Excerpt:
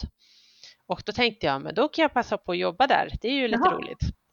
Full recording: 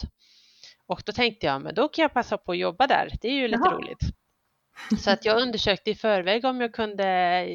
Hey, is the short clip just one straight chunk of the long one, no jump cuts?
yes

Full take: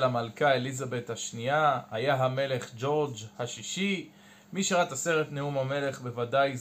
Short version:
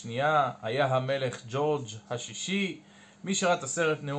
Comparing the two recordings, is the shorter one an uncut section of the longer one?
yes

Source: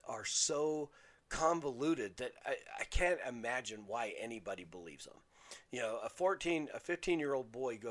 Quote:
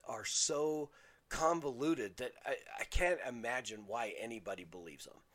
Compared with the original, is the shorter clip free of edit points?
yes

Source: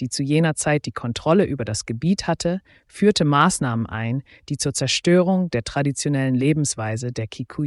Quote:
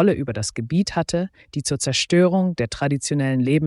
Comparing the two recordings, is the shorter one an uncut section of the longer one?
no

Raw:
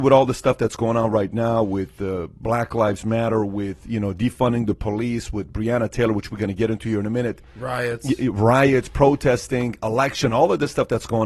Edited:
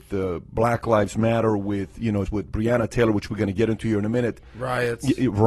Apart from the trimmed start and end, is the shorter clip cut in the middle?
yes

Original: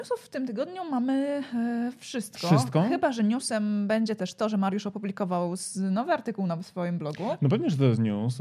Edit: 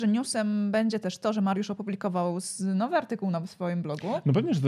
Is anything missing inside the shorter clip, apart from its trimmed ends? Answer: no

